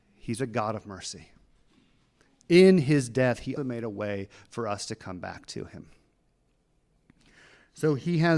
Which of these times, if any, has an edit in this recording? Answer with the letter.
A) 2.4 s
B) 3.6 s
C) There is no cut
B